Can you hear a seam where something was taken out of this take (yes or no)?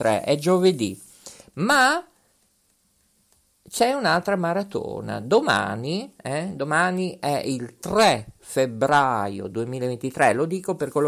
no